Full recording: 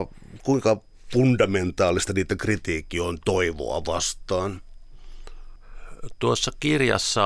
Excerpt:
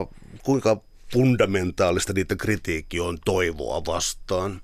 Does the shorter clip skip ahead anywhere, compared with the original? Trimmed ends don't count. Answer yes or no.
no